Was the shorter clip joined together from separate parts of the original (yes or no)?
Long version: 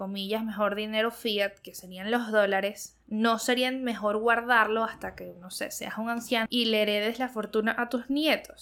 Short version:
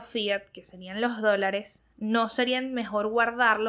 no